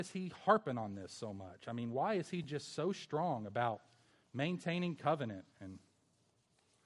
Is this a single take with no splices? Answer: yes; 0 cuts

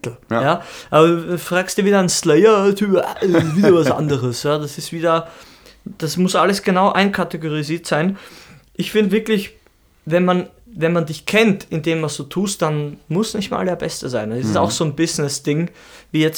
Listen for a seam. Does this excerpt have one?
no; 0 cuts

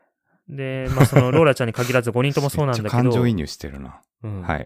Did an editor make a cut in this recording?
no; 0 cuts

